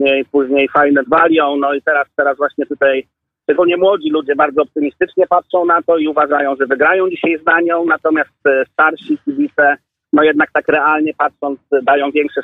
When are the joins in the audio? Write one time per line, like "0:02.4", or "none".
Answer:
0:01.0